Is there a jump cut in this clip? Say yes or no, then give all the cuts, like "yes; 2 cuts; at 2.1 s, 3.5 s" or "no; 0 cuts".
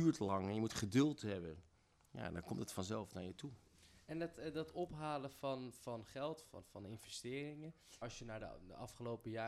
yes; 2 cuts; at 6.4 s, 8.0 s